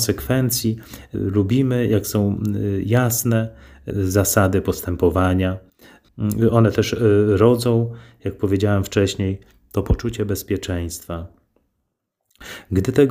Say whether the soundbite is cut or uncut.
uncut